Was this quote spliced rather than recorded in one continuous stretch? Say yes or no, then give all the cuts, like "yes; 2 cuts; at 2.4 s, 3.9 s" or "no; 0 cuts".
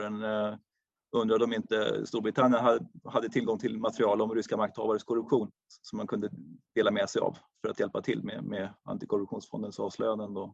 no; 0 cuts